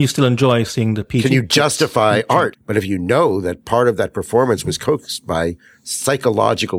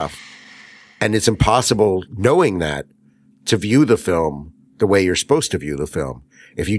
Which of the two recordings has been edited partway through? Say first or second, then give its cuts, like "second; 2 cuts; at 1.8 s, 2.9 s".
first; 1 cut; at 2.5 s